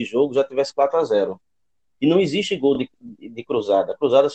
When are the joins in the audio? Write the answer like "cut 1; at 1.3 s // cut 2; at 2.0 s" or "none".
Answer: none